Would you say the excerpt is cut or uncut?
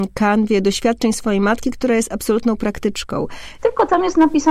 cut